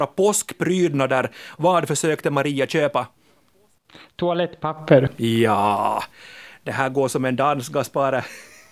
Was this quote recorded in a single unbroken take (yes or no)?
yes